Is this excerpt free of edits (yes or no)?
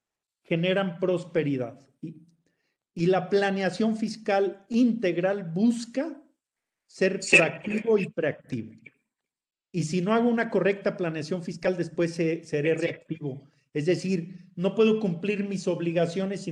yes